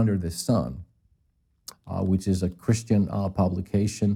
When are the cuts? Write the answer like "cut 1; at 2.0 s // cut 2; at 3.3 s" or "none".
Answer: cut 1; at 1.7 s